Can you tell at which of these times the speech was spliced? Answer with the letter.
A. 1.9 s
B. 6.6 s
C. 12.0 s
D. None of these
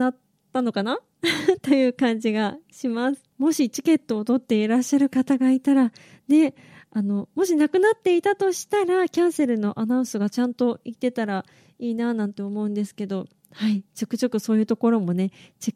D